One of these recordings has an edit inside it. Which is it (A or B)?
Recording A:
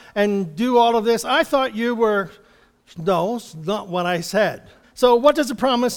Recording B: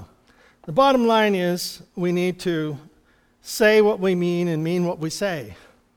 A